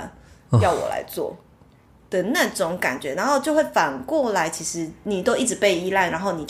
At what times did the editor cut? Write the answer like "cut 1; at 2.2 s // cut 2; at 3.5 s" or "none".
none